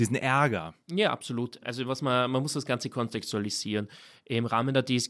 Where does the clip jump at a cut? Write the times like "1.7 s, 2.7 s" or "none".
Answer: none